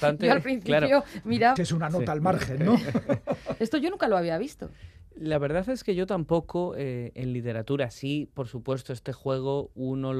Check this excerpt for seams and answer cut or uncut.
cut